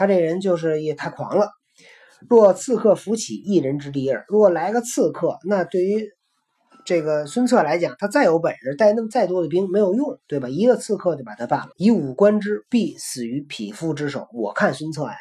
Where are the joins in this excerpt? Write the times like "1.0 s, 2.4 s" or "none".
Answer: 11.7 s